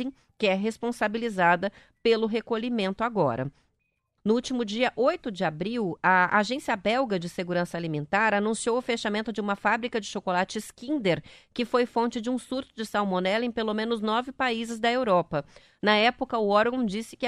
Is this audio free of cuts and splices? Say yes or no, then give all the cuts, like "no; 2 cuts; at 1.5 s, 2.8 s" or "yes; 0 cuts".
no; 1 cut; at 4.2 s